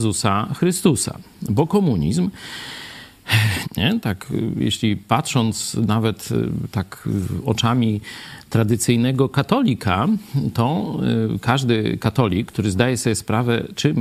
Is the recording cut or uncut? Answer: cut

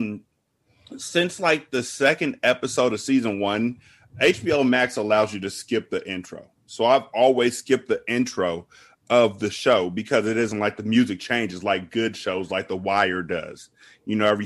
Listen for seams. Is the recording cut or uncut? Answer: uncut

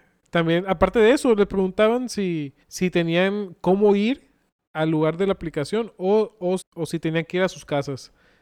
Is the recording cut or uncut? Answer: cut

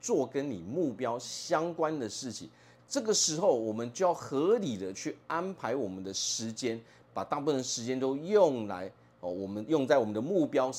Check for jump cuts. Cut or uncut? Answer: cut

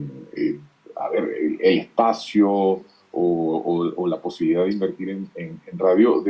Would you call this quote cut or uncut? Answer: uncut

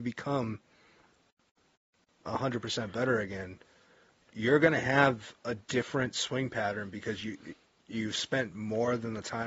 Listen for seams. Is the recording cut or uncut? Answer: uncut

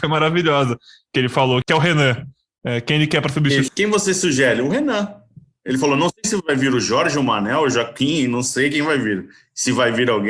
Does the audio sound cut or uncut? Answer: cut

